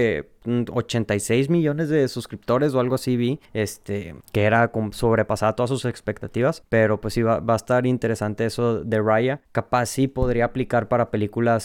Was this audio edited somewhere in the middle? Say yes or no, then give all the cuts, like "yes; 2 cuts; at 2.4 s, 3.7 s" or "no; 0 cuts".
no; 0 cuts